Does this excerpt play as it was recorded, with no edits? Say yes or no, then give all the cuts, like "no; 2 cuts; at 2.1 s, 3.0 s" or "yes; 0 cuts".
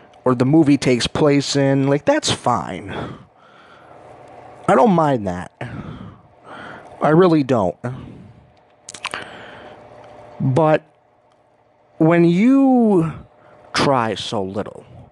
yes; 0 cuts